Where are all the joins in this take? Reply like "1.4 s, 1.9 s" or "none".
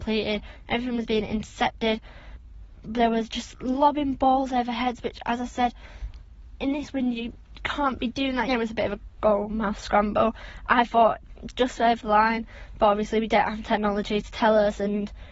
8.5 s